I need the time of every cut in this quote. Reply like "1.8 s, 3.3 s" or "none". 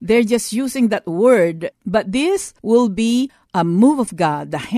1.7 s